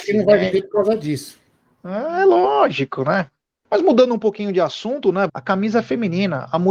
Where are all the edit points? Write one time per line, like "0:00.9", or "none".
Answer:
0:03.6
0:05.3